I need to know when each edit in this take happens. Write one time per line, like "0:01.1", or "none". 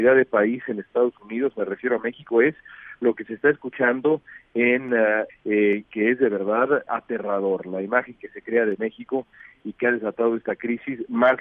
0:05.3
0:06.9